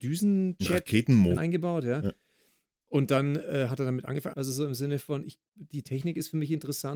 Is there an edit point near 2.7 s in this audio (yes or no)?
no